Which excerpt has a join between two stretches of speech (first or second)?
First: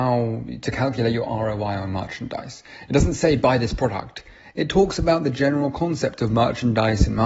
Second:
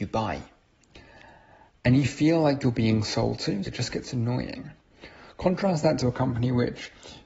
second